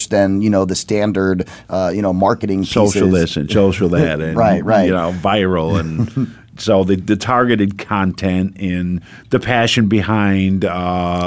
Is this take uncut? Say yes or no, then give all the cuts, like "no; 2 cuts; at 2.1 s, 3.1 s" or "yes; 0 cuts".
yes; 0 cuts